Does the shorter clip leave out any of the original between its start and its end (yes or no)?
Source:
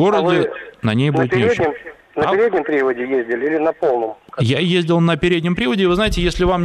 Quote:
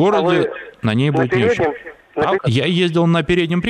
yes